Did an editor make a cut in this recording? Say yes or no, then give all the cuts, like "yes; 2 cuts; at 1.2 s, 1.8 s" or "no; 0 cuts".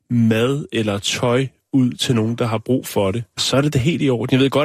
yes; 1 cut; at 3.4 s